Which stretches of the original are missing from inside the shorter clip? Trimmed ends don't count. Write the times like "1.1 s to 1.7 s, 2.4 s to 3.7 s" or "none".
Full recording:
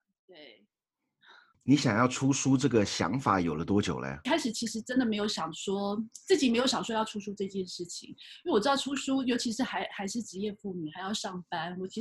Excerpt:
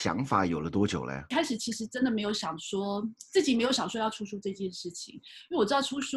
none